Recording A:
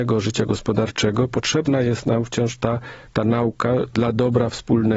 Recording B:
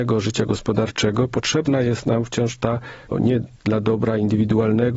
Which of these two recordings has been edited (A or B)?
B